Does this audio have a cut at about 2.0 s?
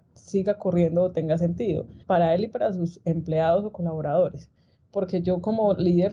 yes; 1 cut; at 2.0 s

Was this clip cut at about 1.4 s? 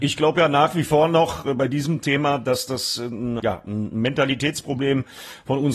no; 1 cut; at 3.4 s

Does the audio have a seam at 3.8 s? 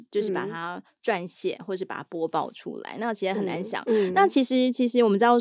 yes; 1 cut; at 3.8 s

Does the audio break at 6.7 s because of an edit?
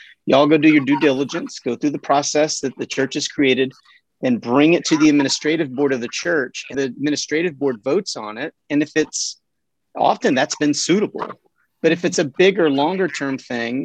yes; 1 cut; at 6.7 s

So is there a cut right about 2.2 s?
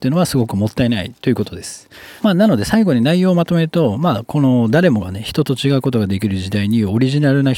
yes; 1 cut; at 2.2 s

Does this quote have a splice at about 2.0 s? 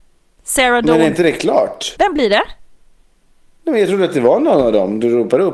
yes; 1 cut; at 2.0 s

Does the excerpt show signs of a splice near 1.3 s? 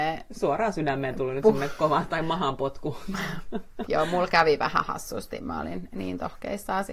no; 1 cut; at 3.9 s

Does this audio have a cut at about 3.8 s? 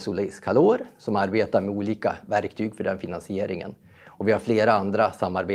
no; 0 cuts

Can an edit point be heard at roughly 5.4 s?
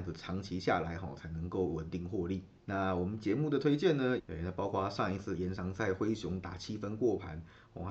no; 2 cuts; at 2.6 s, 4.2 s

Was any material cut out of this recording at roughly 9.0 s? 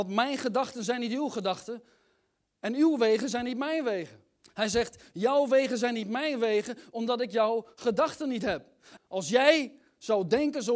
yes; 2 cuts; at 4.4 s, 9.0 s

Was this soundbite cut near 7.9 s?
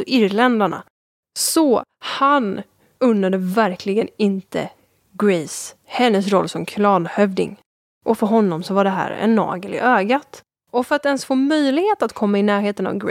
no; 2 cuts; at 3.0 s, 10.6 s

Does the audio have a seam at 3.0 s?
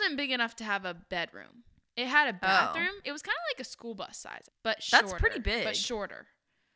yes; 2 cuts; at 3.0 s, 4.5 s

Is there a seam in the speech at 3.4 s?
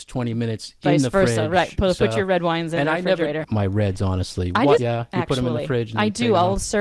yes; 2 cuts; at 3.4 s, 4.8 s

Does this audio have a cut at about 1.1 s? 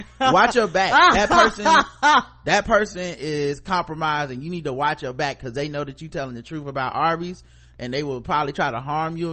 no; 0 cuts

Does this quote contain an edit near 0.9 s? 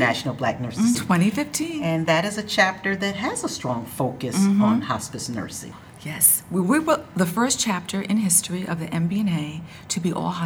yes; 1 cut; at 0.9 s

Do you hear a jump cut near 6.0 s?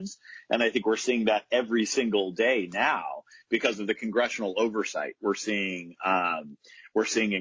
no; 0 cuts

